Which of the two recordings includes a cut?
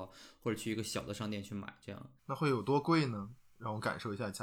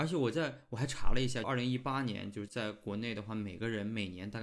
second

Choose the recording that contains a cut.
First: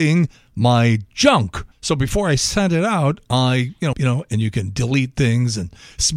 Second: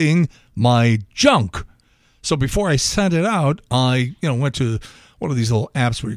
first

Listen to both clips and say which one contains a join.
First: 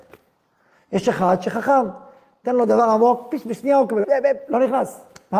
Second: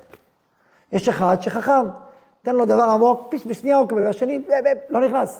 first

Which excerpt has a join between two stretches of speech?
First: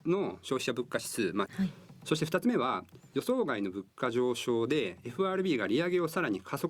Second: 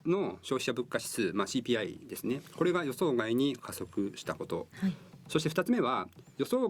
first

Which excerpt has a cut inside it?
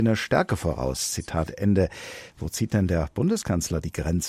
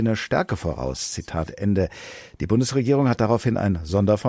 first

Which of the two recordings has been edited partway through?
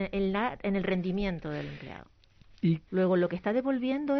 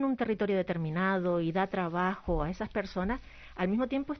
first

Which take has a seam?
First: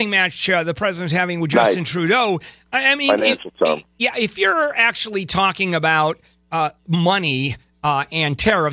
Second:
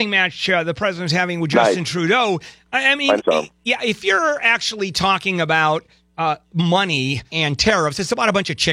second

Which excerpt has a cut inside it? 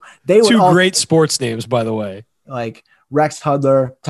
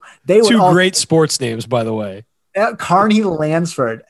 first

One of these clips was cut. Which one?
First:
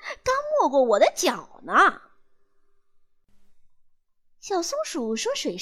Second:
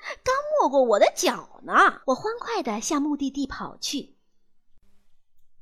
second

